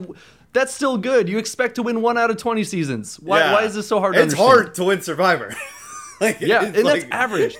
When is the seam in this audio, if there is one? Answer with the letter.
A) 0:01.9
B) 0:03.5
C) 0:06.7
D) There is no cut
D